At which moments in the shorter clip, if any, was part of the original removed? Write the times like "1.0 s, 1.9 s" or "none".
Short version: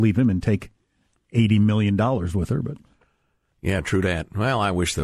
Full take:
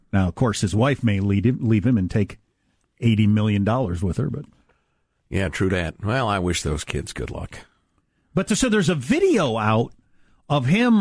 none